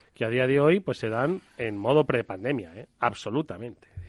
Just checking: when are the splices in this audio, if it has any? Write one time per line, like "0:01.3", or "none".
0:01.5